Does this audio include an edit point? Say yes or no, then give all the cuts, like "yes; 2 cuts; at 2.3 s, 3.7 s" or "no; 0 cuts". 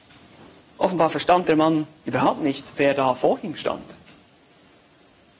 no; 0 cuts